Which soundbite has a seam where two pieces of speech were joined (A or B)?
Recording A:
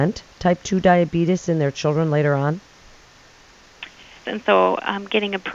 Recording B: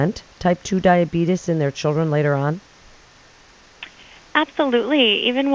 A